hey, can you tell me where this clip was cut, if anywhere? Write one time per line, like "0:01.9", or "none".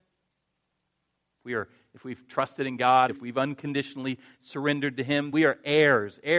0:03.1
0:05.3